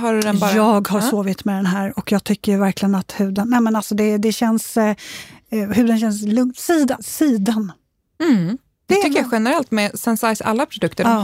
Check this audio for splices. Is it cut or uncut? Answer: cut